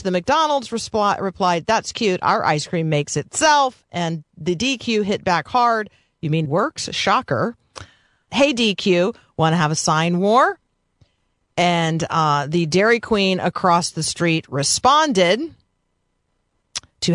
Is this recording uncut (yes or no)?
no